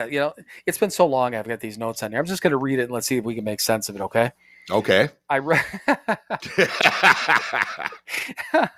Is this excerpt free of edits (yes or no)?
yes